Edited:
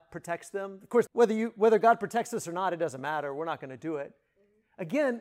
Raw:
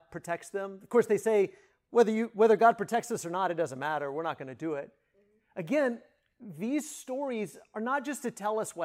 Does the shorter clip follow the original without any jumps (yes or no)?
no